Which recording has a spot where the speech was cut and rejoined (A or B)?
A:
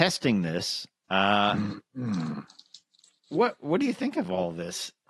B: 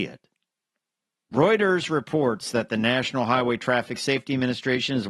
A